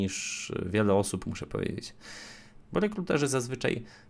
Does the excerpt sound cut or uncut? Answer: cut